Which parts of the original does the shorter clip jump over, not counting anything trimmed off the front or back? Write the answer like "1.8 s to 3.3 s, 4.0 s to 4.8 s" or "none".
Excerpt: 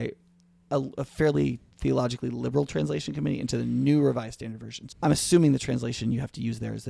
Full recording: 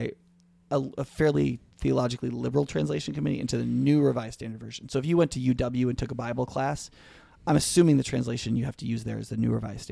4.9 s to 7.4 s